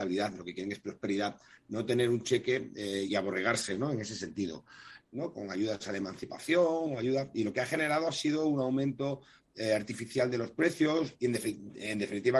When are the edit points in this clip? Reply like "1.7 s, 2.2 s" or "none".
3.1 s, 5.0 s, 11.2 s